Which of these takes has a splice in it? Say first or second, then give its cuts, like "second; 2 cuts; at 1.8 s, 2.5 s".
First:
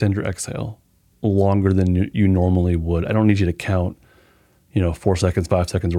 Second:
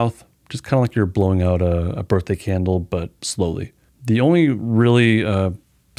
second; 1 cut; at 3.9 s